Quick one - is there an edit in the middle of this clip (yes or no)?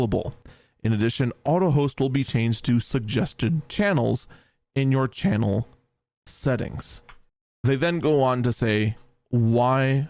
no